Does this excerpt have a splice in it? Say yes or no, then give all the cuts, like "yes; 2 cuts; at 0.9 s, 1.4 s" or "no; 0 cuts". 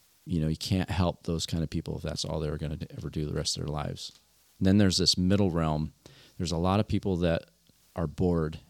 no; 0 cuts